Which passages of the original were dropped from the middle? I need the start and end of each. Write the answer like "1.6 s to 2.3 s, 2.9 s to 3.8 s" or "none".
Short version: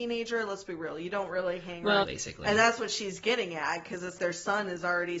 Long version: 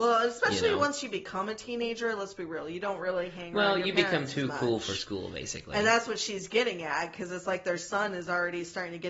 3.7 s to 5.3 s, 7.5 s to 7.6 s